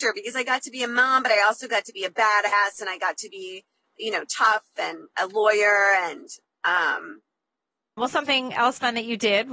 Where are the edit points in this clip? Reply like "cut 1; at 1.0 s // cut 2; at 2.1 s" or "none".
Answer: cut 1; at 5.1 s // cut 2; at 8.0 s